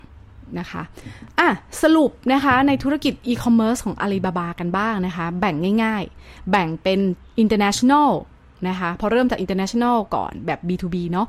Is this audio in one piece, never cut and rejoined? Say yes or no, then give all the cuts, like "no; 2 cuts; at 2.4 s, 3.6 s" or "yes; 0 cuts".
yes; 0 cuts